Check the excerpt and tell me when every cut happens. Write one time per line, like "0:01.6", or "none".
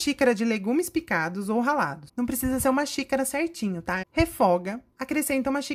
0:02.1
0:04.0